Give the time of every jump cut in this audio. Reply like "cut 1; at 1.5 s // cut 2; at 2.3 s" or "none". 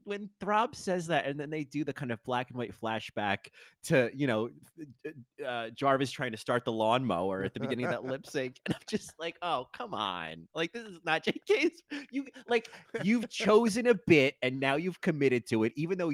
none